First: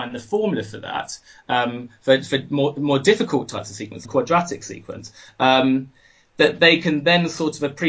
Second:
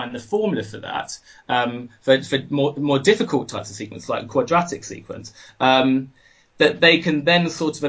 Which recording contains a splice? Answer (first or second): first